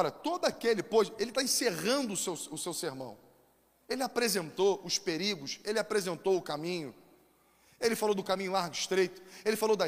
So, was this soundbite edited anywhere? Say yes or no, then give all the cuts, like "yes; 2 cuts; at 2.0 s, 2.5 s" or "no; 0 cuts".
no; 0 cuts